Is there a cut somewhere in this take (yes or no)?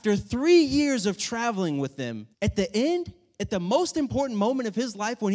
yes